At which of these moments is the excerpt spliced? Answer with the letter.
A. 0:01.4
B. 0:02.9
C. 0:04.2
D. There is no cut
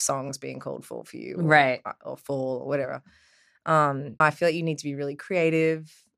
C